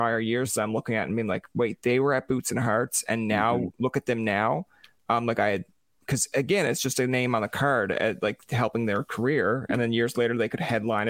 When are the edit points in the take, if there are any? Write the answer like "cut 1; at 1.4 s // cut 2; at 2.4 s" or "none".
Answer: none